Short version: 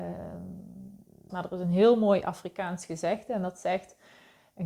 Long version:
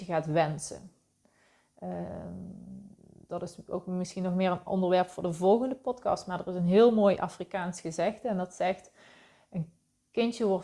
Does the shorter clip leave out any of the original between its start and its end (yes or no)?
yes